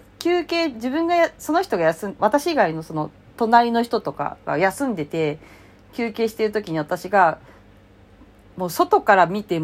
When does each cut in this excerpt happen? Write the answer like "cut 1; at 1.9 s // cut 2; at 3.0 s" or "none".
cut 1; at 2.2 s